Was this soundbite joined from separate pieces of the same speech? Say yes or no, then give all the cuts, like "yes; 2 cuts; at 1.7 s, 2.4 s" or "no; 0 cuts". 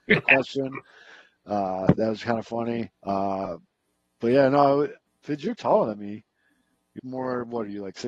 yes; 3 cuts; at 2.9 s, 5.1 s, 7.0 s